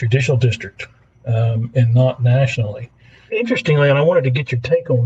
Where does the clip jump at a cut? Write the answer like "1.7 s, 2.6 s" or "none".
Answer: 3.3 s

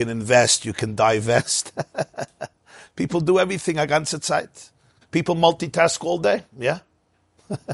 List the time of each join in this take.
5.0 s

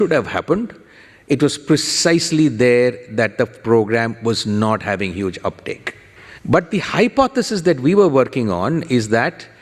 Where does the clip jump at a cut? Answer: 6.4 s

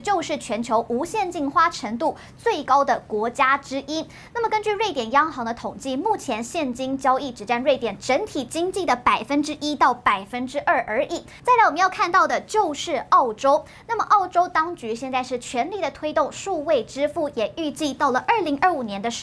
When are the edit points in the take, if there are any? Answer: 11.4 s

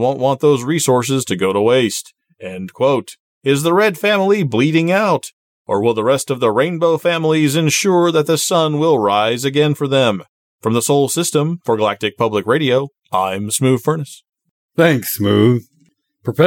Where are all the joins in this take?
none

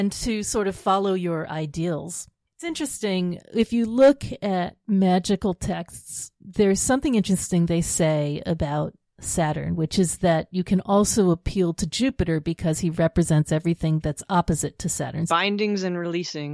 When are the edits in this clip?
15.3 s

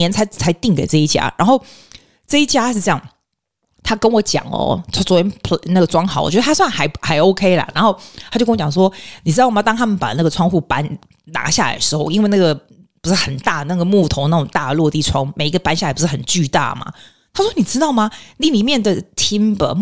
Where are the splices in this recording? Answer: none

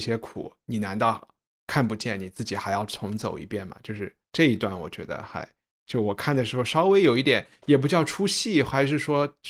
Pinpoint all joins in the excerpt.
none

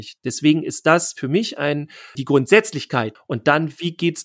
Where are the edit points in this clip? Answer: 2.2 s, 3.2 s

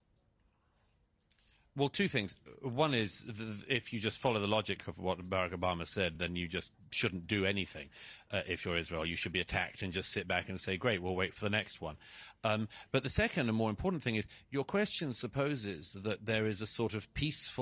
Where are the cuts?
none

